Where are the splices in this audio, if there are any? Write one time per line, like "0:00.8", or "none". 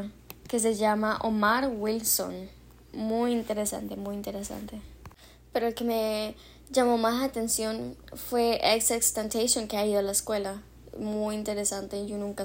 none